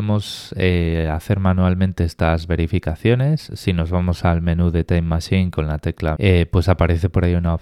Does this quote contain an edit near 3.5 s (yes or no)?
no